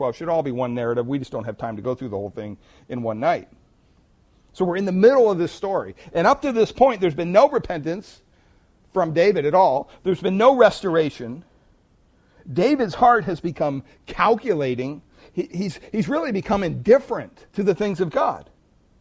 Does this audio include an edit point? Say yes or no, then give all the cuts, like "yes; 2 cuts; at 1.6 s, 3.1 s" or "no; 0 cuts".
yes; 1 cut; at 17.5 s